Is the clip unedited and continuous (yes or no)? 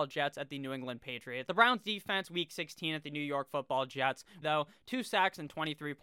no